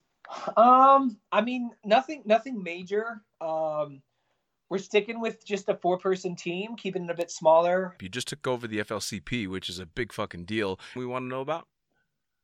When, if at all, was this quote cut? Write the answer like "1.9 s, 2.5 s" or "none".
8.0 s, 11.0 s